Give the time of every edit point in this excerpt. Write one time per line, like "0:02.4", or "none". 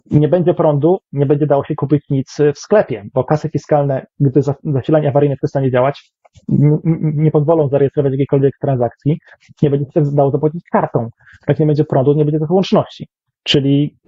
none

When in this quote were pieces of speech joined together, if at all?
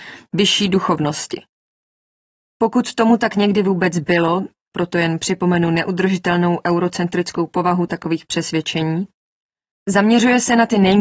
0:04.7
0:09.7

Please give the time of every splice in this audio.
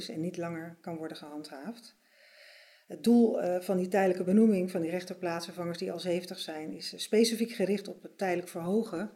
none

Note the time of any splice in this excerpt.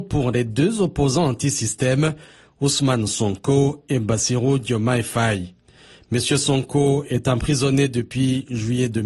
none

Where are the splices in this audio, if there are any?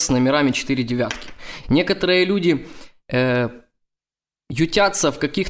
0:01.6

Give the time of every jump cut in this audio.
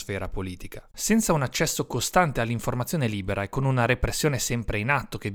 0:00.9

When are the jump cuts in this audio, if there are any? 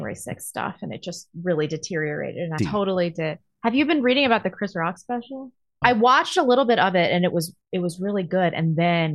0:02.6
0:05.8

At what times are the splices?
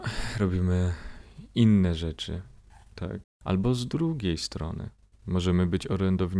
0:03.2

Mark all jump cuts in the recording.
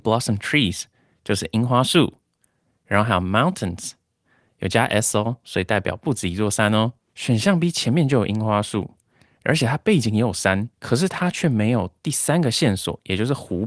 0:07.1
0:10.7

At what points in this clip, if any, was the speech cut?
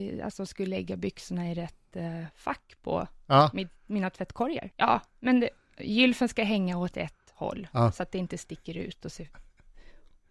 0:04.7

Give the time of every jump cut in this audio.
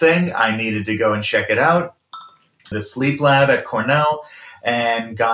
0:02.7

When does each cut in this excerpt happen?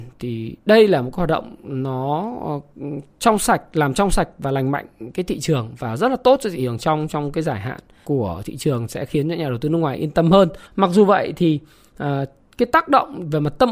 0:08.0
0:10.7

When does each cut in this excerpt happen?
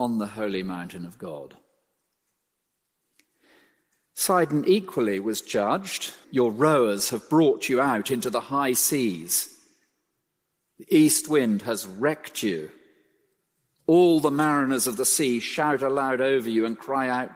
0:06.2

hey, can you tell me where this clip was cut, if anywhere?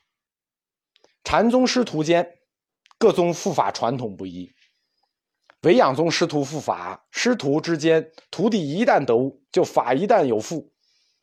0:01.1

